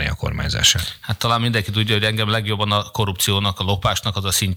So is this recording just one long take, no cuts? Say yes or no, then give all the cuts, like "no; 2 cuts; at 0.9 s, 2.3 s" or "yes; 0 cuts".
yes; 0 cuts